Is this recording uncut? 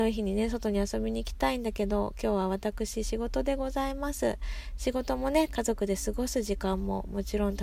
no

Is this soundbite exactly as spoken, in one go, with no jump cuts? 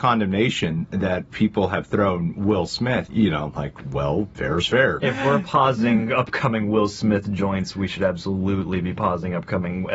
no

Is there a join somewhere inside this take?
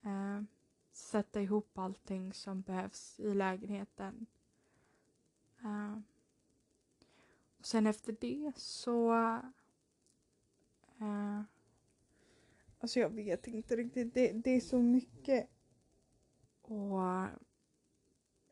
yes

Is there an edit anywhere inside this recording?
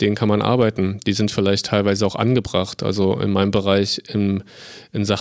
no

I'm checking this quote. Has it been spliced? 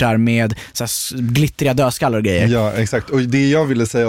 no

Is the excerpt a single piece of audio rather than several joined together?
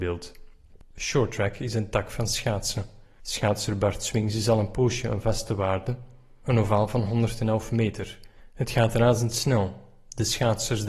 no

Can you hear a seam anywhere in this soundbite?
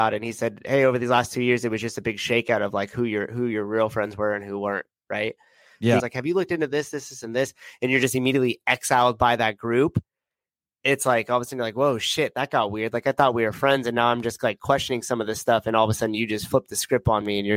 yes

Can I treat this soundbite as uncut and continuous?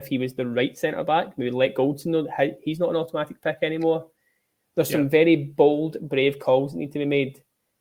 yes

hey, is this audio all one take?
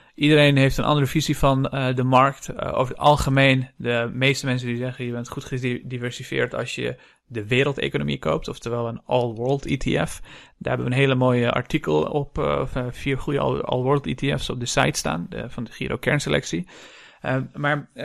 yes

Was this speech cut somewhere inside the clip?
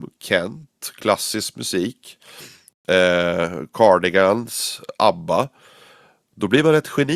no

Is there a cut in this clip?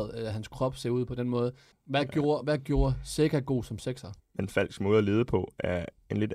yes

